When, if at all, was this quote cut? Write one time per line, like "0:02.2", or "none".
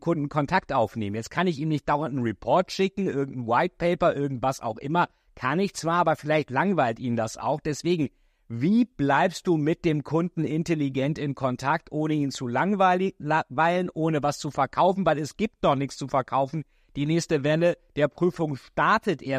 none